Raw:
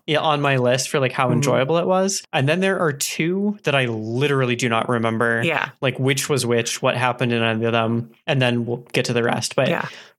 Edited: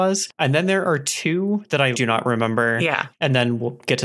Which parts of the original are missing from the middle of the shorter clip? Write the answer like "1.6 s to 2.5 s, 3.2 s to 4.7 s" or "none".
3.9 s to 4.6 s, 5.7 s to 8.2 s